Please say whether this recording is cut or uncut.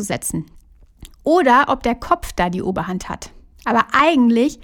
cut